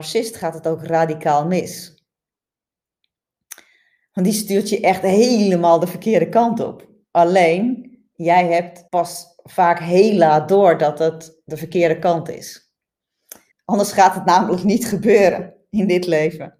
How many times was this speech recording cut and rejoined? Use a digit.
2